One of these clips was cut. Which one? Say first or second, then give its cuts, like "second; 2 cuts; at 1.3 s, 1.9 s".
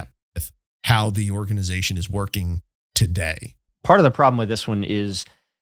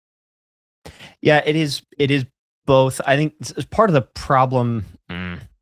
first; 1 cut; at 3.7 s